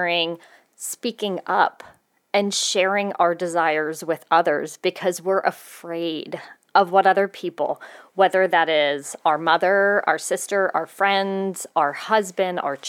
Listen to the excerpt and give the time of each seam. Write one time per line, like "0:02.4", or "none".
none